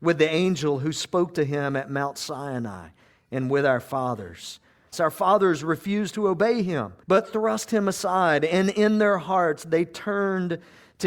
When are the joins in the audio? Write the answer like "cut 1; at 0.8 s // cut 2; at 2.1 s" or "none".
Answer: cut 1; at 4.9 s // cut 2; at 7.0 s